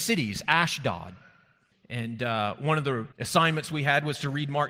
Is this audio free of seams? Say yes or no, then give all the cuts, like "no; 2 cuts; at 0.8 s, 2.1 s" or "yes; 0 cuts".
no; 2 cuts; at 1.7 s, 3.1 s